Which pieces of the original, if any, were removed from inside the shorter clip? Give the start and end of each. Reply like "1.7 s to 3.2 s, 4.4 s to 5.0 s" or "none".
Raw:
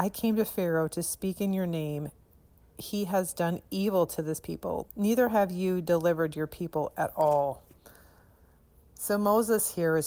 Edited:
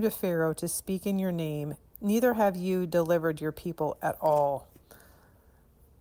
2.3 s to 4.9 s